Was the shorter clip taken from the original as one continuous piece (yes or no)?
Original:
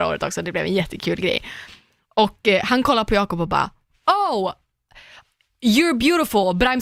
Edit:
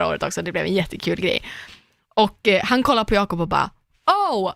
yes